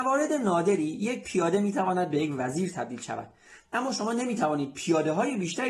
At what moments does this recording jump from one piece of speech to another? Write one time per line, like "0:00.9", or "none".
none